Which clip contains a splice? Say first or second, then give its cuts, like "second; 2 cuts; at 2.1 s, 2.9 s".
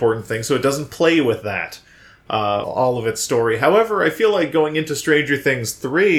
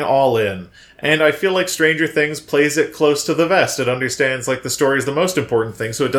first; 1 cut; at 2.6 s